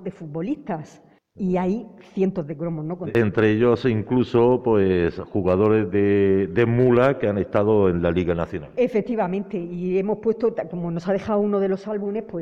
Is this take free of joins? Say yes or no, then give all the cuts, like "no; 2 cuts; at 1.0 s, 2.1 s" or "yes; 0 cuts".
yes; 0 cuts